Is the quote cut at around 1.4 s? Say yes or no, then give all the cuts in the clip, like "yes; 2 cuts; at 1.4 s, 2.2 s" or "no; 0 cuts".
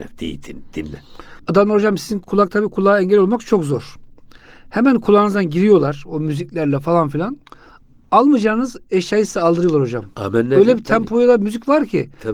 yes; 1 cut; at 1.4 s